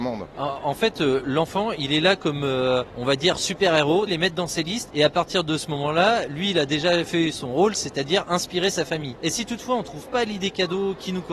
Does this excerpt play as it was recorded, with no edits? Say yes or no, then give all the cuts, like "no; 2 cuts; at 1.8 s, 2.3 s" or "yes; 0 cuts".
no; 2 cuts; at 4.1 s, 9.2 s